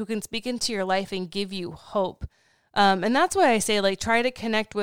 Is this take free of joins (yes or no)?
yes